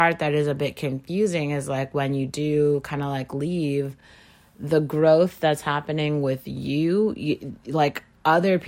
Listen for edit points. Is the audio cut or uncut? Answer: uncut